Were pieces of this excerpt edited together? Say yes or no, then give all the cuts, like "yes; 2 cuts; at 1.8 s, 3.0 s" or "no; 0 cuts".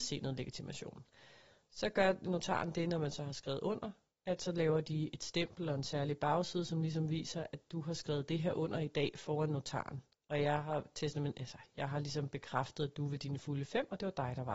no; 0 cuts